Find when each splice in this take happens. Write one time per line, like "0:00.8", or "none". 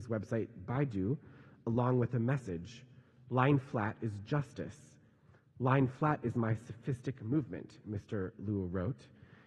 none